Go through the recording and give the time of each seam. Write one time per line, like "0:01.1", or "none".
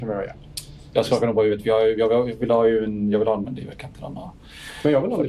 0:03.4